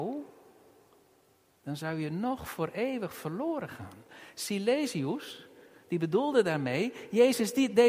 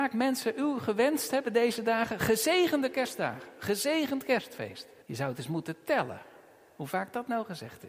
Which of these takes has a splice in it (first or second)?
second